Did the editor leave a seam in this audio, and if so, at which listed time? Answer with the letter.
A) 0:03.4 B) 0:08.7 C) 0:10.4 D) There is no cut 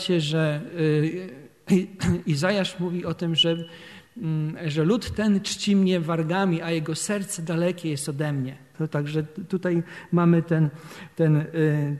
B